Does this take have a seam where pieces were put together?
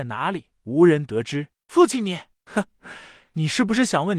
no; 0 cuts

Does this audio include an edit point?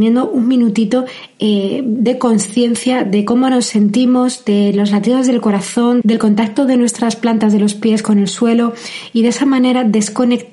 yes; 1 cut; at 6.0 s

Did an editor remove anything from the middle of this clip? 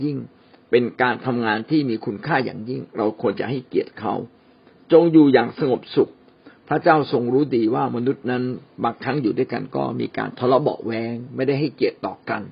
no; 0 cuts

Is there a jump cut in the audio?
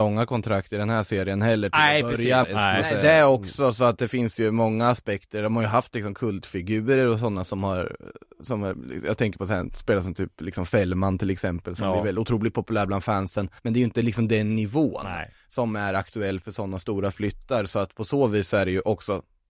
yes; 2 cuts; at 2.4 s, 13.6 s

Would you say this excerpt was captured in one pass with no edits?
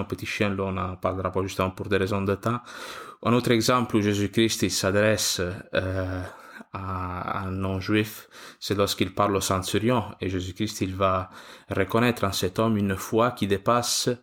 yes; 0 cuts

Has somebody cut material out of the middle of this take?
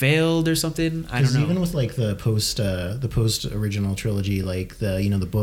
no; 0 cuts

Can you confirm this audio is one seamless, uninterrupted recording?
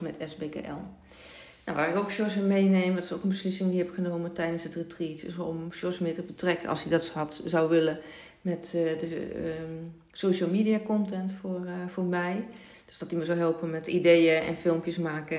yes; 0 cuts

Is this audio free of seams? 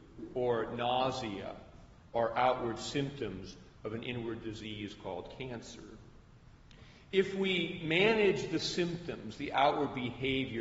yes; 0 cuts

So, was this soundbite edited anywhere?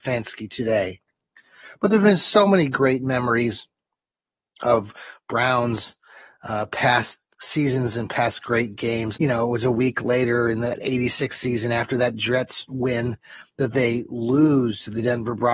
yes; 1 cut; at 9.2 s

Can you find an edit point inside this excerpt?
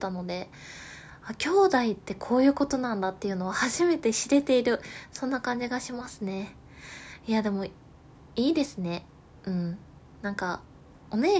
no; 0 cuts

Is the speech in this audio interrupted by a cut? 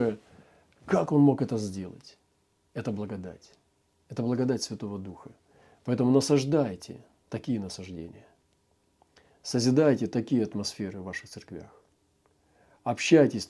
no; 0 cuts

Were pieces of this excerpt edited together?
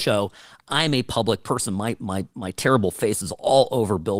no; 0 cuts

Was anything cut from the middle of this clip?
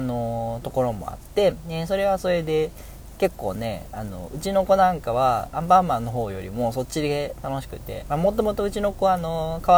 no; 0 cuts

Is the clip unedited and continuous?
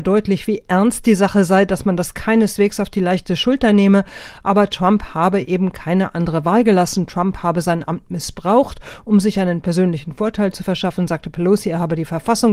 yes; 0 cuts

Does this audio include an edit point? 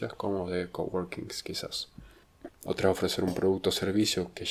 yes; 1 cut; at 2.5 s

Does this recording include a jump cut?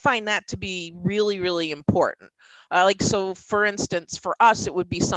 no; 0 cuts

